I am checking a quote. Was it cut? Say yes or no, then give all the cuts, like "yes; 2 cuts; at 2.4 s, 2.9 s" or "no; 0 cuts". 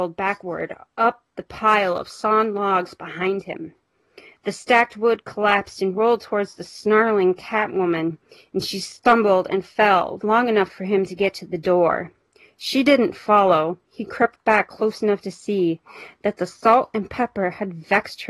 yes; 1 cut; at 10.2 s